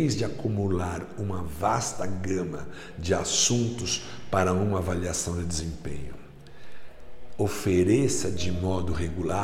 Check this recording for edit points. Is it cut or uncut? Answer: uncut